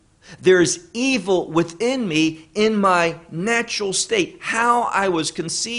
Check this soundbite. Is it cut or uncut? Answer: uncut